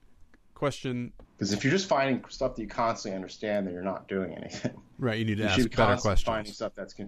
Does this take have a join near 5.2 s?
no; 1 cut; at 1.2 s

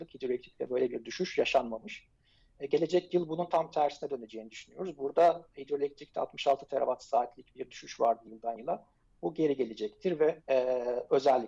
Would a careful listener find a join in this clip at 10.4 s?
yes; 1 cut; at 10.4 s

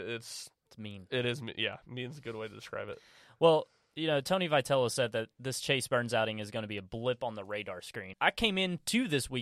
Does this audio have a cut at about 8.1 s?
yes; 1 cut; at 8.1 s

